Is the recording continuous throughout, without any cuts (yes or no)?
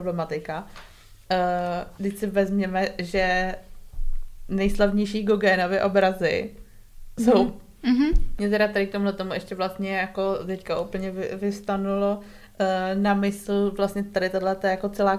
no